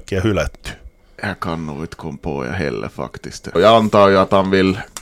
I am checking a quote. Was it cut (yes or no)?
yes